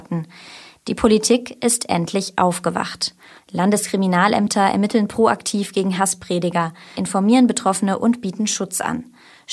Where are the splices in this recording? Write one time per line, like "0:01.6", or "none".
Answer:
0:03.4
0:06.9